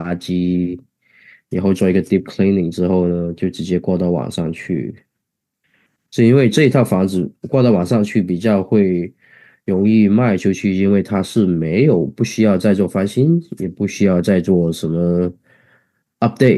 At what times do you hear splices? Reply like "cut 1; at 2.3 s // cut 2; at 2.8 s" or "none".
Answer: none

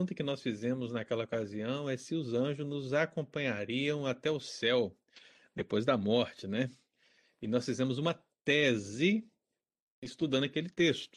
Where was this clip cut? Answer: none

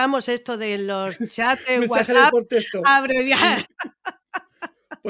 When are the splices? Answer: cut 1; at 3.6 s

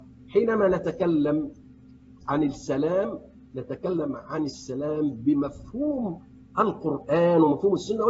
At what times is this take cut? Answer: cut 1; at 2.2 s

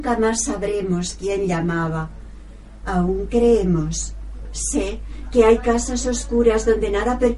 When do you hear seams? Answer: cut 1; at 2.8 s

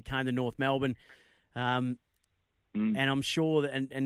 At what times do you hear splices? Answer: none

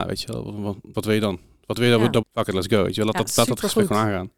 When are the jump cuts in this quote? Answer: cut 1; at 0.9 s // cut 2; at 2.2 s

